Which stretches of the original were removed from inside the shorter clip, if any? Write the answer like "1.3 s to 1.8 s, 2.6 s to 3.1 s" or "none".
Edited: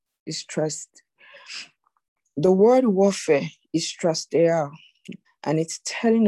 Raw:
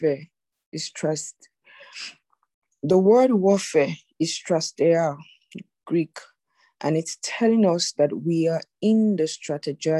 5.7 s to 6.6 s